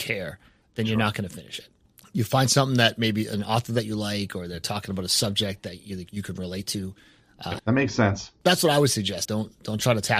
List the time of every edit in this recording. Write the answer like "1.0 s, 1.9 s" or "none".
7.6 s, 9.3 s